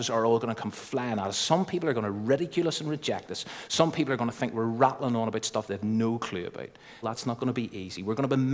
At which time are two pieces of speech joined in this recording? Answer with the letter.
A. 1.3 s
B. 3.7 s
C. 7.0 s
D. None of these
C